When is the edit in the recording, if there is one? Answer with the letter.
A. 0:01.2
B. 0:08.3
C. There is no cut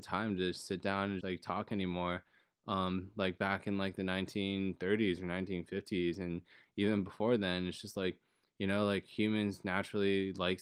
A